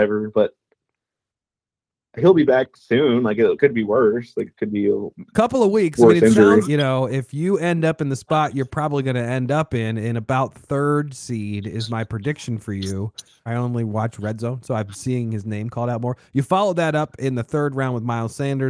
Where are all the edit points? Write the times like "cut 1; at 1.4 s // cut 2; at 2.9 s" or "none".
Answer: cut 1; at 6.6 s // cut 2; at 13.5 s